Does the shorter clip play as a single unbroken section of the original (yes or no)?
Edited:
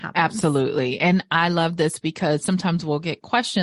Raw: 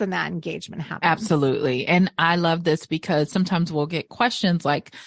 yes